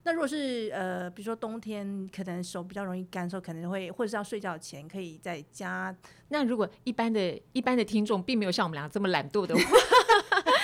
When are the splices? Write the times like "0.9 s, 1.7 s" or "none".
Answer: 6.3 s